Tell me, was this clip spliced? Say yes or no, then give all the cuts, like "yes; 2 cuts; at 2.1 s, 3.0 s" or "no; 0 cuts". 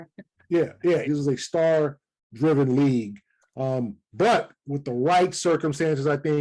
yes; 1 cut; at 1.0 s